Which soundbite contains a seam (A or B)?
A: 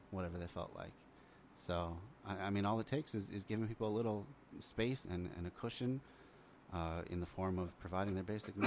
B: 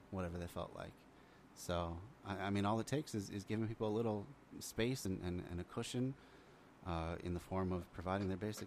A